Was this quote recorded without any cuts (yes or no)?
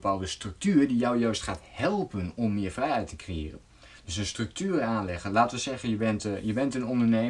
yes